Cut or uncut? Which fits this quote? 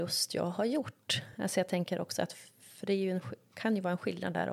uncut